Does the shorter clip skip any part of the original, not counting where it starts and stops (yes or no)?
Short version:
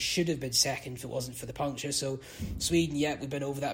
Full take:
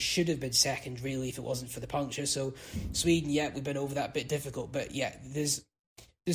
yes